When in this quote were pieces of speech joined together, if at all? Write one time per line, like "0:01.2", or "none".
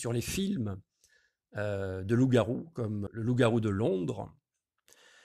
0:03.1